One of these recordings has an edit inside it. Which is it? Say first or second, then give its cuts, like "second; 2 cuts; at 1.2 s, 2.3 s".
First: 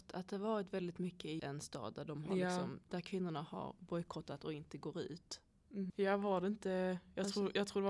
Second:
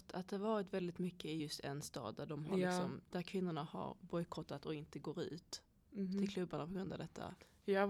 first; 2 cuts; at 1.4 s, 5.9 s